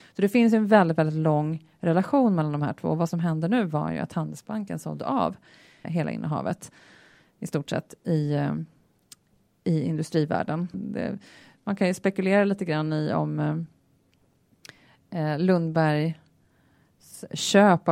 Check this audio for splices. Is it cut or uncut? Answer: cut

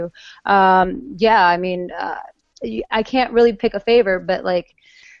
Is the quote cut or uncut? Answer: uncut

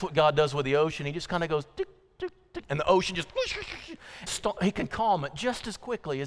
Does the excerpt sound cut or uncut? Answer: cut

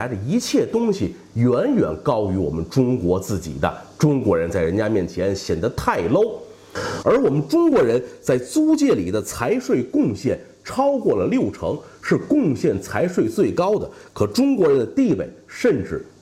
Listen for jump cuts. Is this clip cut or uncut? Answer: cut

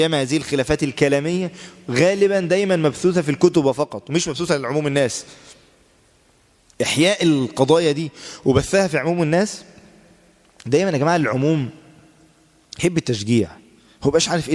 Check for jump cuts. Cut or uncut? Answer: uncut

